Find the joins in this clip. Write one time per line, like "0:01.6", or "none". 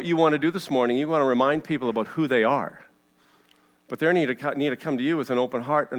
none

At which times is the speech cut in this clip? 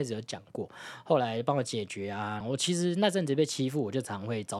0:02.4

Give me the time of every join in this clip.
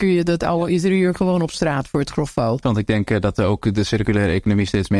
0:02.6

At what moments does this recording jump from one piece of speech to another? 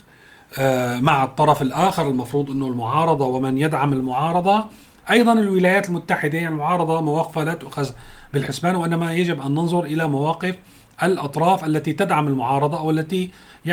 none

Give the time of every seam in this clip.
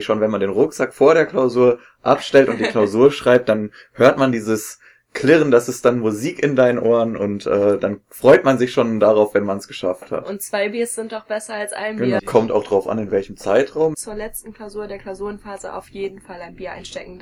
0:12.2
0:13.9

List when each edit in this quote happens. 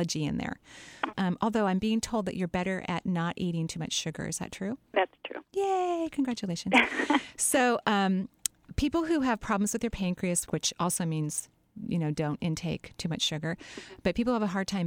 0:01.1
0:10.5

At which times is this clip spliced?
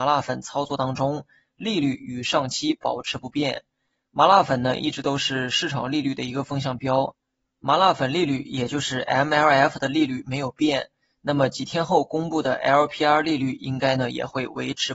none

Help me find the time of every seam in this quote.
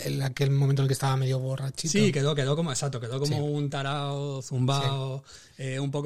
none

